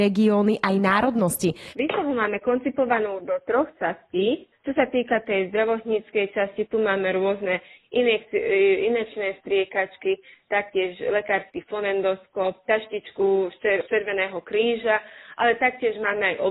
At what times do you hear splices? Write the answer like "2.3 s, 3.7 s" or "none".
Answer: 1.7 s